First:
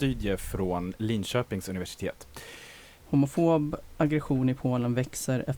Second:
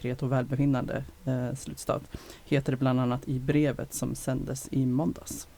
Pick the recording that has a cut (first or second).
first